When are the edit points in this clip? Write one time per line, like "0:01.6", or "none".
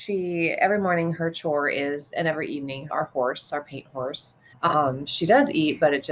0:02.9
0:04.5